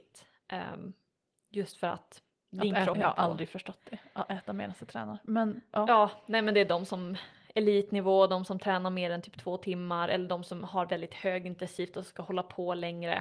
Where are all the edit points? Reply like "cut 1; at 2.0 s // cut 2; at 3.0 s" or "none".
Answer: cut 1; at 2.9 s